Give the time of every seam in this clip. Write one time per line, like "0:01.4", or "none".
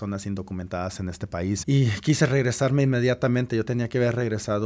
0:01.6